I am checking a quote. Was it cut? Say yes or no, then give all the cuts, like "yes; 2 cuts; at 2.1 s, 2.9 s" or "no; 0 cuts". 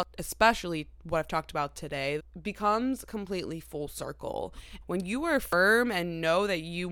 yes; 2 cuts; at 2.2 s, 4.8 s